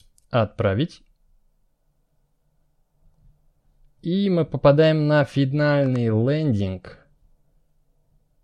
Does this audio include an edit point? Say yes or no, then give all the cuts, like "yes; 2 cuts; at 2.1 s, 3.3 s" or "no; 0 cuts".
no; 0 cuts